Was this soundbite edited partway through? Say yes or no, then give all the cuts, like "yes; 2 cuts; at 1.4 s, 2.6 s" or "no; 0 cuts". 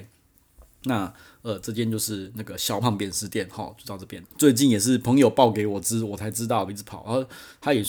yes; 3 cuts; at 2.8 s, 4.2 s, 6.7 s